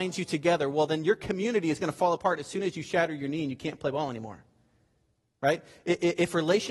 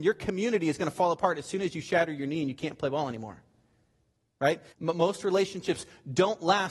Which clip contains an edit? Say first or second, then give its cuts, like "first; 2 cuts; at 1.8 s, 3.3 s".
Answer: second; 1 cut; at 4.7 s